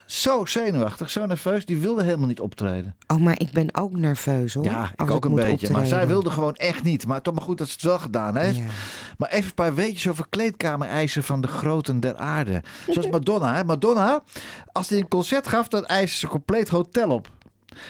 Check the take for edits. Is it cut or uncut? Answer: uncut